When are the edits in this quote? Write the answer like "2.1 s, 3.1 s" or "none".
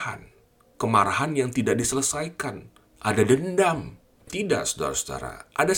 4.3 s